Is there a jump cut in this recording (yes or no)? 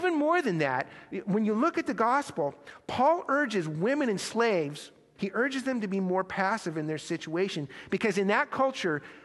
yes